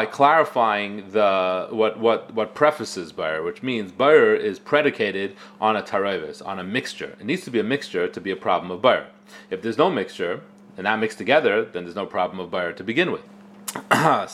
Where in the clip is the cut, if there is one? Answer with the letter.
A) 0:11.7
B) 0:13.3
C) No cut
B